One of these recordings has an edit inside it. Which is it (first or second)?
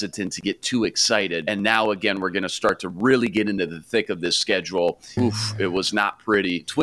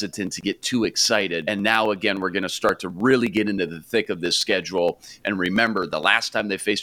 first